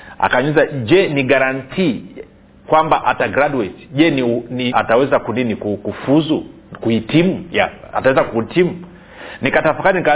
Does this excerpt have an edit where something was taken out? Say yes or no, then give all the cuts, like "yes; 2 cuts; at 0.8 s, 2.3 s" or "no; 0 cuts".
yes; 1 cut; at 4.7 s